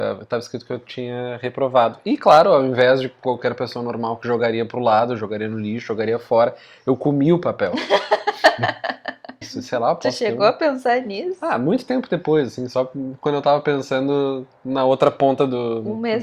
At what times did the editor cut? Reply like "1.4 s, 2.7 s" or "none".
9.4 s